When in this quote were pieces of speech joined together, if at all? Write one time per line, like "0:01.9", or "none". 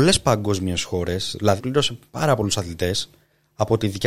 0:01.6